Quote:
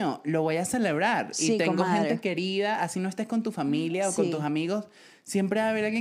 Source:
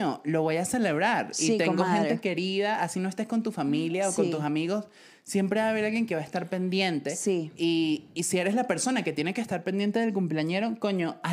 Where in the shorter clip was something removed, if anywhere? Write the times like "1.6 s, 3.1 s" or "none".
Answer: none